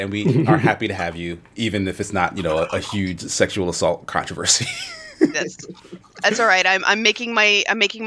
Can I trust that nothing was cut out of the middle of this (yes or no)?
no